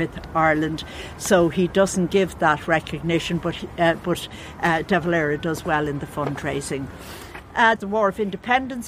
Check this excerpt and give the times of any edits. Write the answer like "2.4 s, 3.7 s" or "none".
7.8 s